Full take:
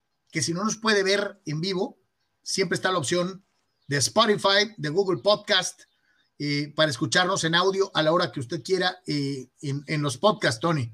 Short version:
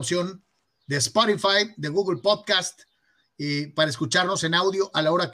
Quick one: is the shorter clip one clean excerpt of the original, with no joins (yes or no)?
yes